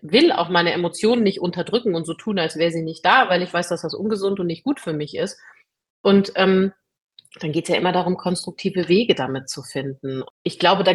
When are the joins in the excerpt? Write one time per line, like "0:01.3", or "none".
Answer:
none